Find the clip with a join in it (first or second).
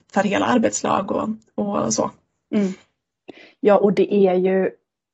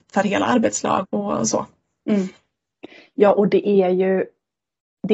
second